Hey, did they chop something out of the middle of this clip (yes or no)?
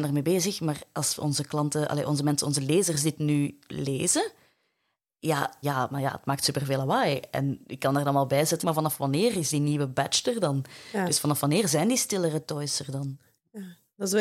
yes